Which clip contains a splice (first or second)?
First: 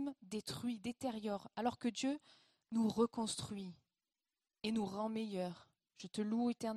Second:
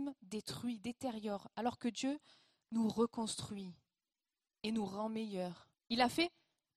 second